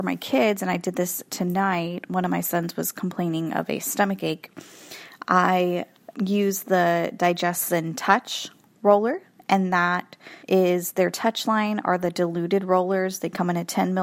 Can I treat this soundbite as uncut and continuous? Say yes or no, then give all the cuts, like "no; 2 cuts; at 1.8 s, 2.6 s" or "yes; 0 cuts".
no; 2 cuts; at 6.1 s, 10.4 s